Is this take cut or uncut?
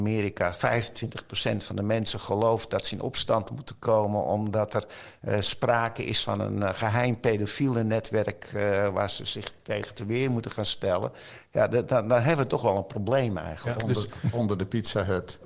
uncut